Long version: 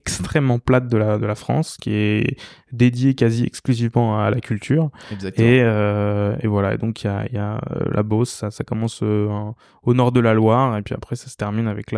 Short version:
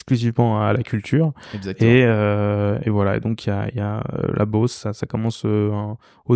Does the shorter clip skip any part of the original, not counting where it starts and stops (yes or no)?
no